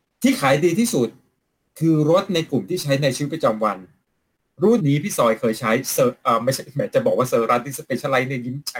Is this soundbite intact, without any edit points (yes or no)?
no